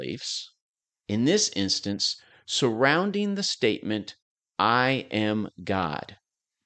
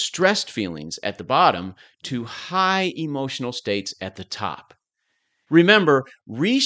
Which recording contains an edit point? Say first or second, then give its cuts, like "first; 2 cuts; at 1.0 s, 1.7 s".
second; 1 cut; at 5.5 s